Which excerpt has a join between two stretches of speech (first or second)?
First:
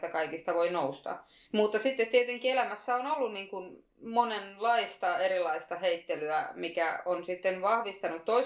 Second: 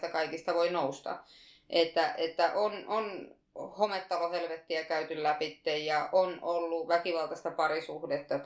first